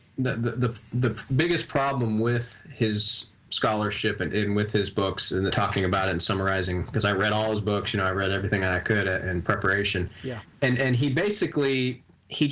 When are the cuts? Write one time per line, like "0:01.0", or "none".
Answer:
0:05.5